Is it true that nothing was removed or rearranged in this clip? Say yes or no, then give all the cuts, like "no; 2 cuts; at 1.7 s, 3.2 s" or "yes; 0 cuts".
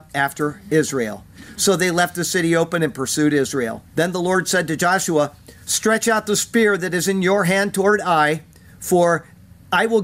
no; 1 cut; at 3.9 s